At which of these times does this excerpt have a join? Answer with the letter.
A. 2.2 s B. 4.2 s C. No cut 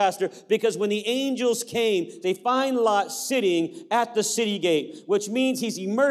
A